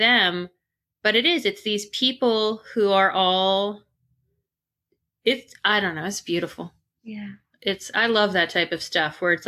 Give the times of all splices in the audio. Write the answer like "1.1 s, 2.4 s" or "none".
none